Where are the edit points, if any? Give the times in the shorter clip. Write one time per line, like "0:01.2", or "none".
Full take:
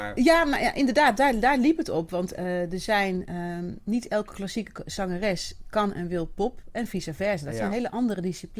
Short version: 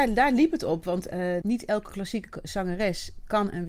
0:01.4

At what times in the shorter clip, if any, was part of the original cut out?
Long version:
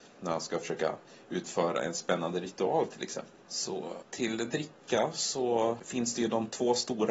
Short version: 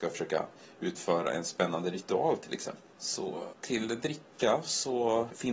none

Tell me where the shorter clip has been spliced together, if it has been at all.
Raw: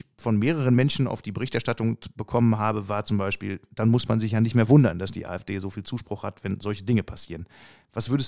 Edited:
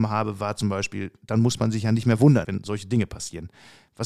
0:02.4

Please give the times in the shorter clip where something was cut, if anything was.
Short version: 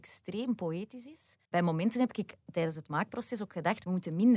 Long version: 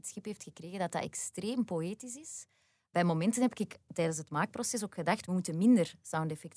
0:01.5

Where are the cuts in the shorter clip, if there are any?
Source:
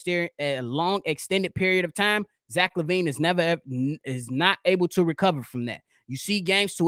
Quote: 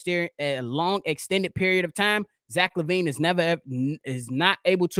none

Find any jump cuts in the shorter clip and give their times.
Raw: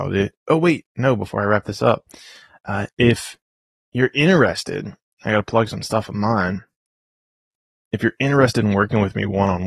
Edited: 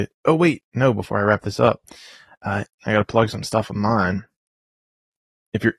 0:02.7

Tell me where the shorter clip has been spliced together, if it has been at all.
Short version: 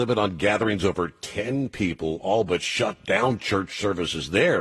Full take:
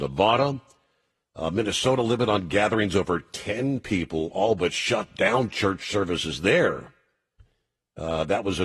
none

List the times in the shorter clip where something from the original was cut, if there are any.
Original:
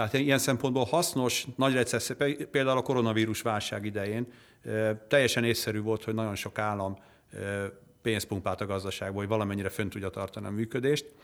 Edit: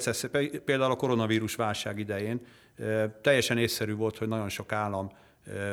none

